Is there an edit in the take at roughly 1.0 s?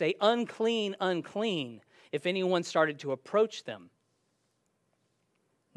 no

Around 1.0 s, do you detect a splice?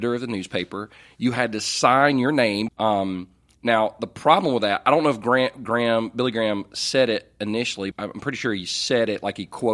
no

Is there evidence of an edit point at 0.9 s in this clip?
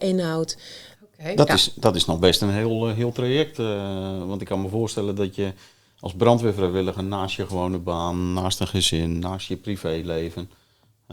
yes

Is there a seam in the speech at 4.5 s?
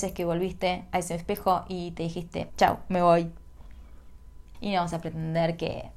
yes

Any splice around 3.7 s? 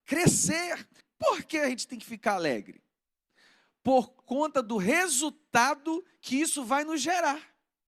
no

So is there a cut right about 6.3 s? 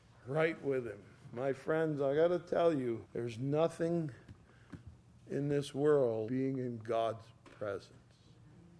yes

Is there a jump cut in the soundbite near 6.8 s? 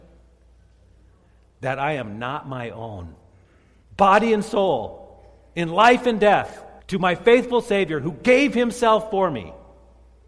yes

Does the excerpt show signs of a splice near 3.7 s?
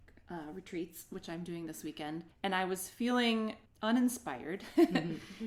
yes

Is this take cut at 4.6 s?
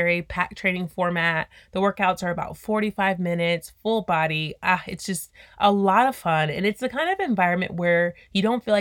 no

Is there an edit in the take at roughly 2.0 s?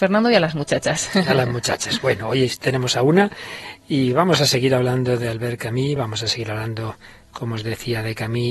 no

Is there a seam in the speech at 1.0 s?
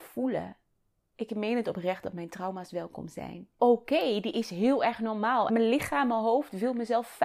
no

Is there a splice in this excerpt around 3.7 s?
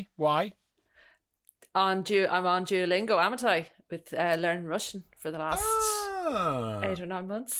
no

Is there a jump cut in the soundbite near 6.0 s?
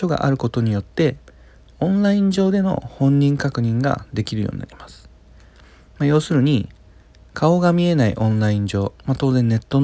no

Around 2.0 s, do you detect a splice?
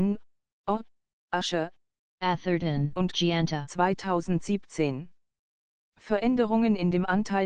yes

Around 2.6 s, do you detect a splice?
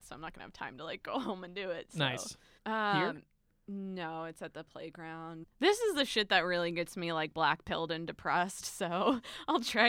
yes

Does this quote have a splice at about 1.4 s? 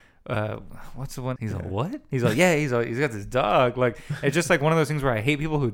yes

